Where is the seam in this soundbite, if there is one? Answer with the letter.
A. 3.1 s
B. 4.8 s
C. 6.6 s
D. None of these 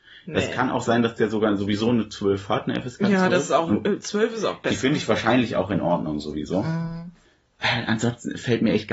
D